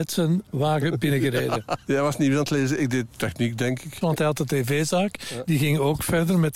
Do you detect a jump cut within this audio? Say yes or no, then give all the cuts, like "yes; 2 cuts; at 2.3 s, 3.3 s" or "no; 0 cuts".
yes; 1 cut; at 4.0 s